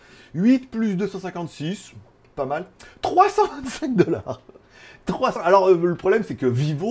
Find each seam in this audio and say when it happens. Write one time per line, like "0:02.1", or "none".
none